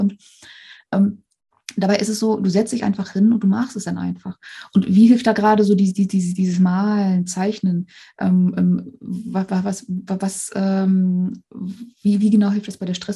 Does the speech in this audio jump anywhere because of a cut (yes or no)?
no